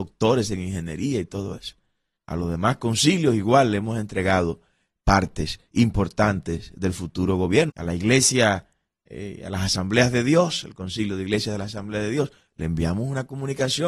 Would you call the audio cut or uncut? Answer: cut